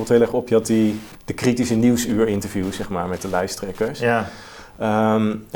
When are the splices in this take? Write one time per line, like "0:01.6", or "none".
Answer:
none